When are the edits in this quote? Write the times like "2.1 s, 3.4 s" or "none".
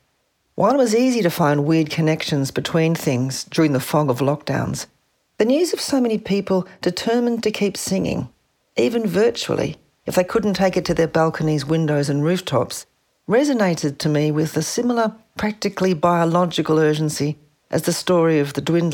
none